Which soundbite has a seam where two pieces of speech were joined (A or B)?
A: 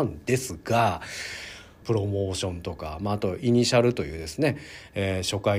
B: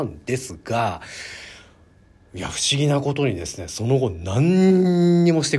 A